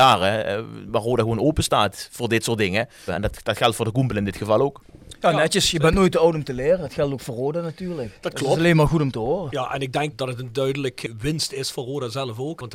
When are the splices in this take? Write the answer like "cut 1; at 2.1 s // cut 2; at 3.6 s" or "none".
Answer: cut 1; at 3.1 s